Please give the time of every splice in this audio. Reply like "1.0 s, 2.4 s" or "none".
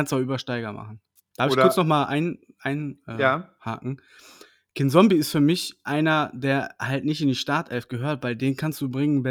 1.2 s